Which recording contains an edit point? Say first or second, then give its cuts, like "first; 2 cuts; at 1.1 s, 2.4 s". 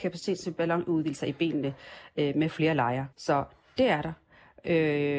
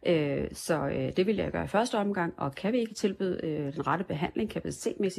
first; 1 cut; at 3.1 s